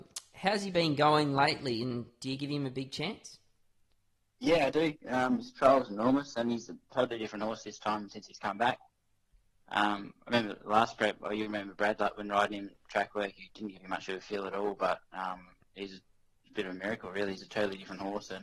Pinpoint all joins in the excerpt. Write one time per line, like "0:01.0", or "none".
0:13.5
0:16.4